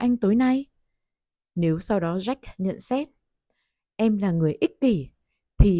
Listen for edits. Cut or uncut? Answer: uncut